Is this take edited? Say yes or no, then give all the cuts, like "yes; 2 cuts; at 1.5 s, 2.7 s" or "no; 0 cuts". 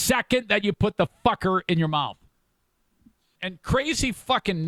yes; 1 cut; at 3.4 s